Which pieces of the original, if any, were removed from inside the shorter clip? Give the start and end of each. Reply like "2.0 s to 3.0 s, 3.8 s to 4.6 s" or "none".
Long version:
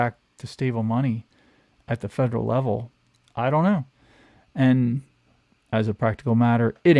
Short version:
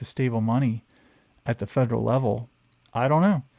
none